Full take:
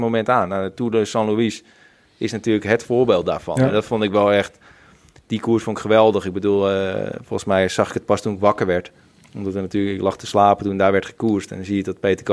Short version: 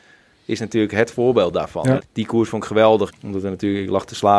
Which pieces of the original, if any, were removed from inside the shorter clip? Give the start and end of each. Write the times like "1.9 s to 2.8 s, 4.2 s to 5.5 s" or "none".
3.7 s to 5.1 s, 6.2 s to 9.2 s